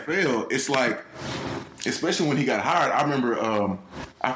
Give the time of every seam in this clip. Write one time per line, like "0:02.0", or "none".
none